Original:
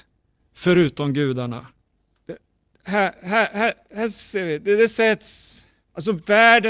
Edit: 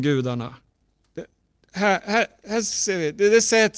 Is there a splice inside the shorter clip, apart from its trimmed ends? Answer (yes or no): yes